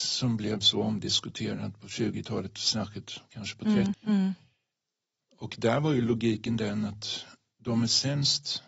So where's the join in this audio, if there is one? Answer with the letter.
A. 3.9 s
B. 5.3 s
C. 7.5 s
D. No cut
A